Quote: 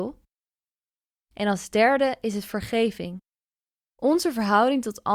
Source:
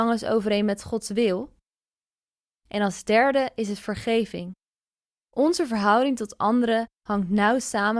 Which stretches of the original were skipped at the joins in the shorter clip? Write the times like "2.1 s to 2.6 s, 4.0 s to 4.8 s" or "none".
none